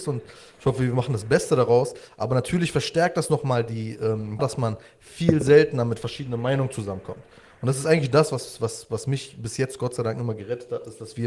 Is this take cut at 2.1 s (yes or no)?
no